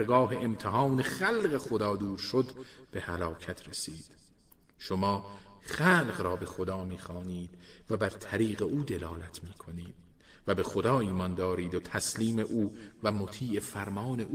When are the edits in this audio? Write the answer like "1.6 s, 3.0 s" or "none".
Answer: none